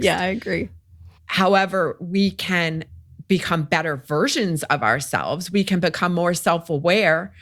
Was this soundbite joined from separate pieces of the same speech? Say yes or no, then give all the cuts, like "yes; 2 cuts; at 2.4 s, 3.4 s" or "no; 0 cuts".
yes; 1 cut; at 1.2 s